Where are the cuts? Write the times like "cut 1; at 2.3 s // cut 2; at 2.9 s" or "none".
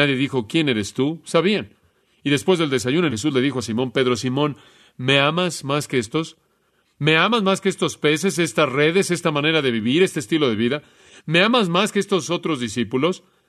cut 1; at 3.1 s // cut 2; at 6.9 s